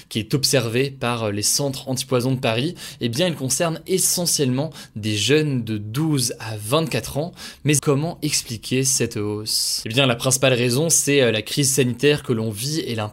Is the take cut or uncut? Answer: cut